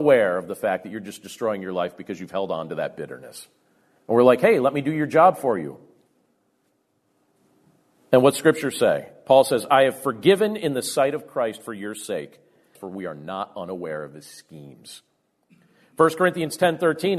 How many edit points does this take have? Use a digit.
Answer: 2